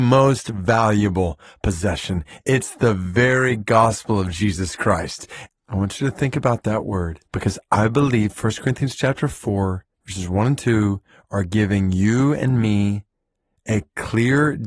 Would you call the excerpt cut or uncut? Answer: cut